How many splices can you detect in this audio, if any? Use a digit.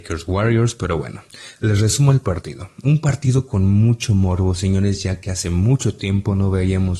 0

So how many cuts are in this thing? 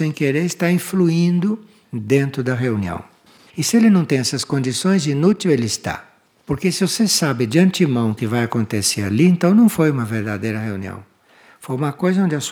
2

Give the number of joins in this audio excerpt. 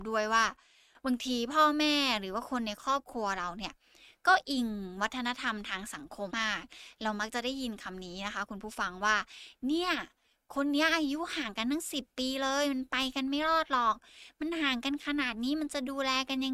1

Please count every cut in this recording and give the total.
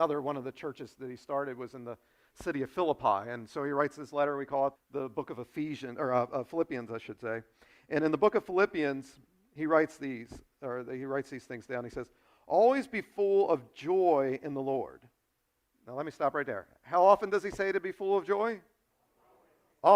1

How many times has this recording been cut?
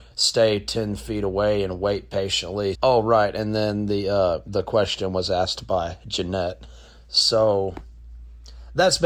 1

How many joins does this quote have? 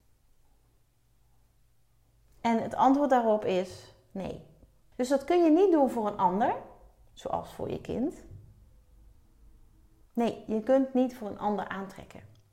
2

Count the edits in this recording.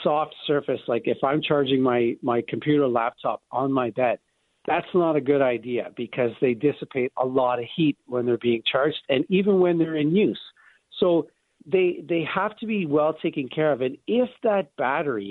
0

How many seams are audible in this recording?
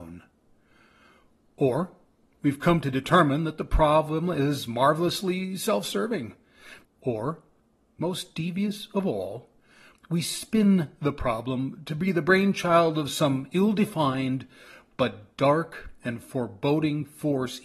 1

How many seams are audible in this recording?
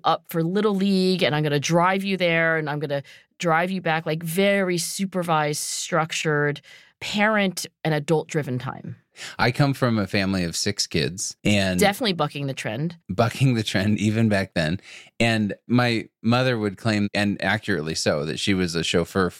1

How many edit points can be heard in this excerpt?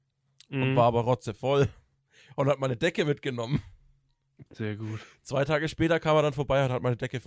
0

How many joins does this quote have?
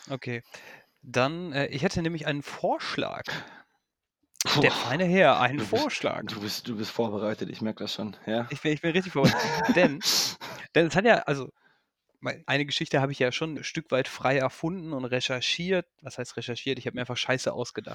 2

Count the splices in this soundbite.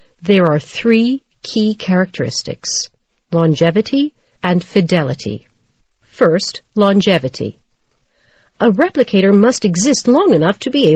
2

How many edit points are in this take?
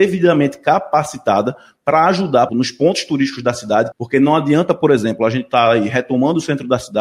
2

